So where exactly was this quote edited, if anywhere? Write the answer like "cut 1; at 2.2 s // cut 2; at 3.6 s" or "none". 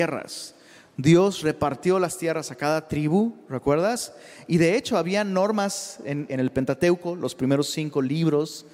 cut 1; at 6.3 s